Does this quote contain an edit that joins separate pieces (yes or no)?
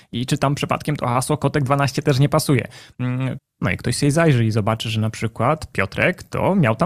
yes